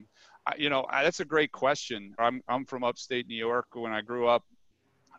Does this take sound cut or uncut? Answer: cut